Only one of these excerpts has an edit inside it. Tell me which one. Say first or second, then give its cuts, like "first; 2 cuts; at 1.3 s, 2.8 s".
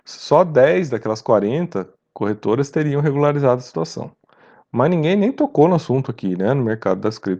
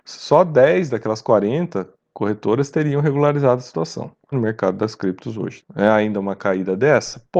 second; 2 cuts; at 4.3 s, 5.6 s